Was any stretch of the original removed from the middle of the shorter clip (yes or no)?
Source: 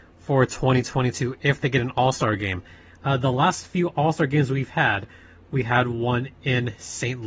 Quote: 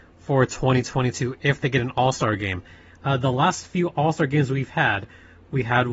no